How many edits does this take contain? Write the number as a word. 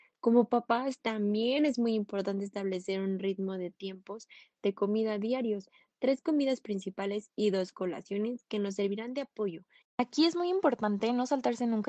one